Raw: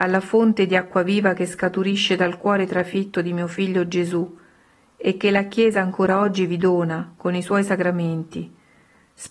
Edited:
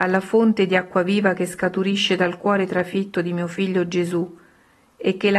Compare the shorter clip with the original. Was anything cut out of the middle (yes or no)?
no